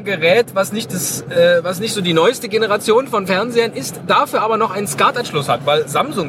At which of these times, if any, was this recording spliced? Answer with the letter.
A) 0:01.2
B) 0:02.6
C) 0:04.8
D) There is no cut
D